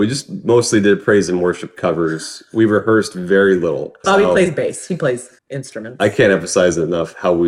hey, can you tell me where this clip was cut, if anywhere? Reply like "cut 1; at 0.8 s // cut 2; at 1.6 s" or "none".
cut 1; at 4.0 s // cut 2; at 5.4 s